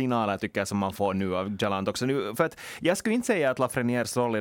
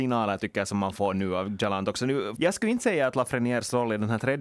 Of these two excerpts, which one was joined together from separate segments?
second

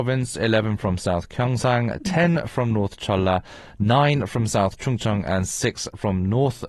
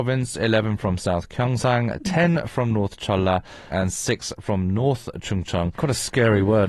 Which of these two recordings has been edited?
second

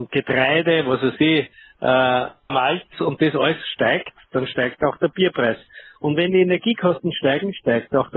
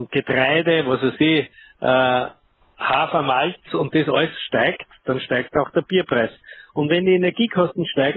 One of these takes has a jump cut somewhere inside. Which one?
first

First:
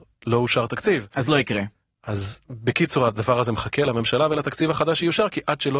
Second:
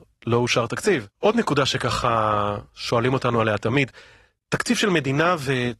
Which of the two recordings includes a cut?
second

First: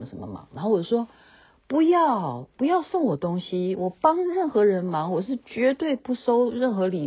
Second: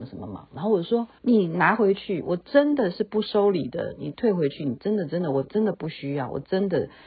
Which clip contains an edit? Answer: second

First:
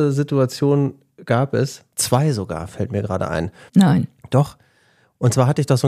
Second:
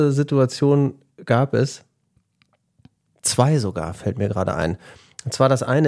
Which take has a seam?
first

